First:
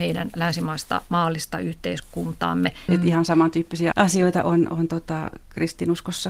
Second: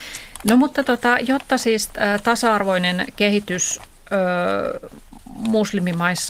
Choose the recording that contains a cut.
first; 2 cuts; at 2.9 s, 3.9 s

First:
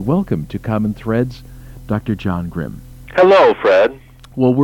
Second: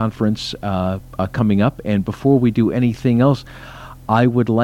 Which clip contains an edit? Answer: first; 1 cut; at 3.1 s

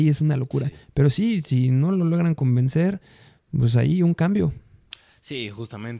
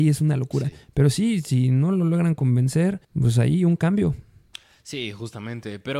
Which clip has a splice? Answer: second; 1 cut; at 3.0 s

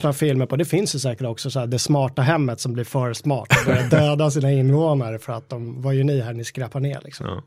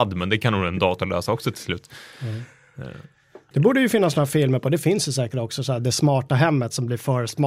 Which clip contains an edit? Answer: second; 1 cut; at 3.5 s

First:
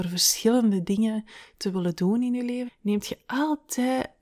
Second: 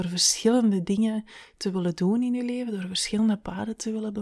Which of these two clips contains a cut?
first; 1 cut; at 2.7 s

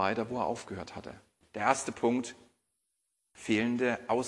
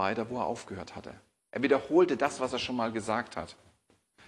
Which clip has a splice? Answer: first; 1 cut; at 1.4 s

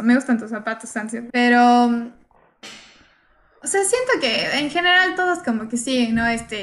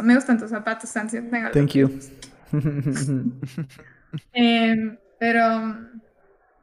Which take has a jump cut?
first; 1 cut; at 1.3 s

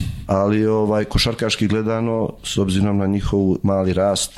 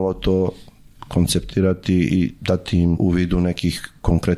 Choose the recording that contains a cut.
second; 1 cut; at 2.9 s

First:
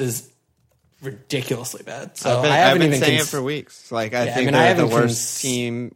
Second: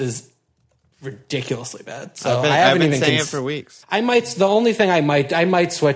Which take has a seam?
second; 1 cut; at 3.8 s

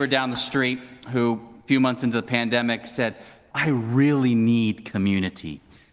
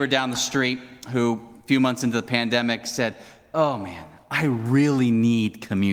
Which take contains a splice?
first; 1 cut; at 3.5 s

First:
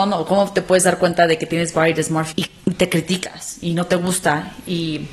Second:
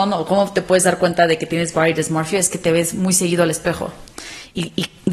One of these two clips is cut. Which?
first; 1 cut; at 2.3 s

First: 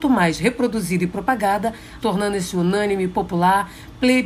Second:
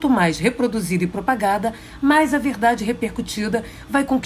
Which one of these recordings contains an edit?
first; 1 cut; at 2.0 s

